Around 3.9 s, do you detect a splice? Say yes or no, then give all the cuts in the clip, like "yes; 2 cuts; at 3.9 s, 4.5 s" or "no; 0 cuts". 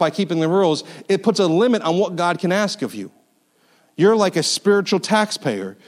no; 0 cuts